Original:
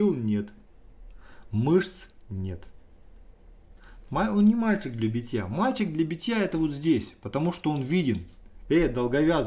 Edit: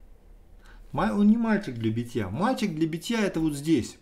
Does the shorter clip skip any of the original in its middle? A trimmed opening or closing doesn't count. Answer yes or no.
no